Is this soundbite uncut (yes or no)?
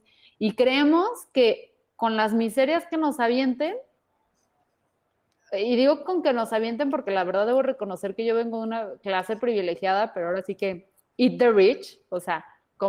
yes